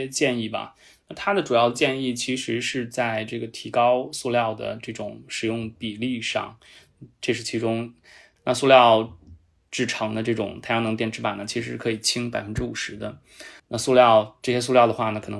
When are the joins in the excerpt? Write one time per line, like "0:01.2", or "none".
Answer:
0:08.4
0:13.6